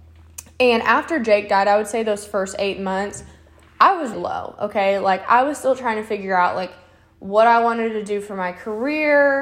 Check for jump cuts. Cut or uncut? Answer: cut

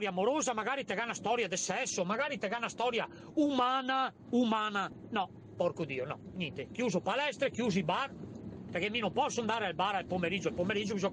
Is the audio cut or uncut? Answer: uncut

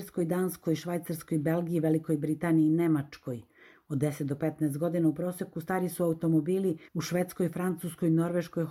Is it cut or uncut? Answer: cut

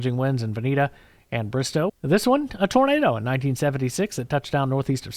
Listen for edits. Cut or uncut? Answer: cut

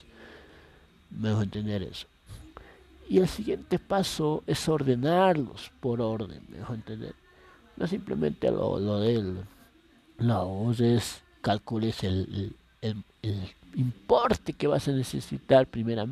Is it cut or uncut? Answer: uncut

